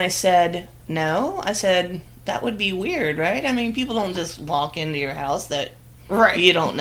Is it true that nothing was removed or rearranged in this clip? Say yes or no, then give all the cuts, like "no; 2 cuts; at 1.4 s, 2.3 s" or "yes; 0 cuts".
yes; 0 cuts